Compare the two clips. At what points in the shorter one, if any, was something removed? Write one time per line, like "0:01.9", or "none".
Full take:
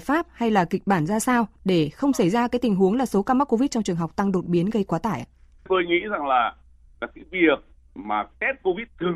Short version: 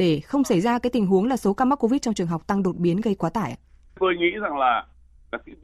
none